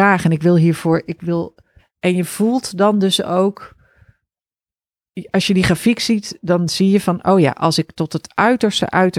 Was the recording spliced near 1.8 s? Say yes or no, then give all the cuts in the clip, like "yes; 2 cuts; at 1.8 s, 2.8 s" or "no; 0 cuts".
yes; 1 cut; at 1.8 s